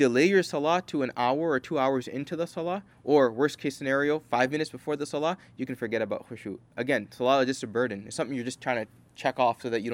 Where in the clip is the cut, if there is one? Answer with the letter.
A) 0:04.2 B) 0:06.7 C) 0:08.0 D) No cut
D